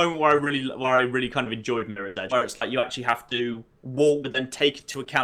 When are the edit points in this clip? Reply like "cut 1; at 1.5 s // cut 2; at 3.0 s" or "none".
cut 1; at 2.3 s // cut 2; at 4.2 s